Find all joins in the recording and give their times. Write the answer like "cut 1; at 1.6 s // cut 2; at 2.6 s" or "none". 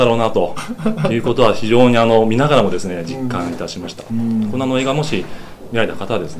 cut 1; at 4.1 s